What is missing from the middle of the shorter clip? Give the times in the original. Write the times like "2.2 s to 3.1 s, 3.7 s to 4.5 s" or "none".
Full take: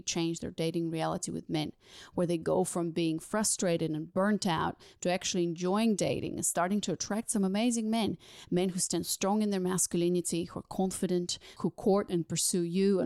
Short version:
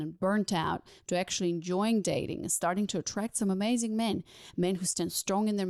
none